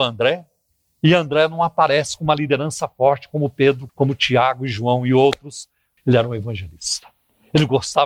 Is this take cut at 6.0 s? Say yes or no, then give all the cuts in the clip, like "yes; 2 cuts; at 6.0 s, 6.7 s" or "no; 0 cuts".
yes; 2 cuts; at 3.9 s, 6.0 s